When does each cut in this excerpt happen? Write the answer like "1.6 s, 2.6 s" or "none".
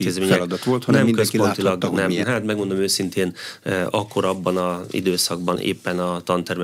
2.2 s, 5.6 s